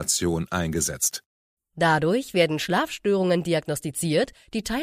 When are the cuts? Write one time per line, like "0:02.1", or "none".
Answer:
0:01.6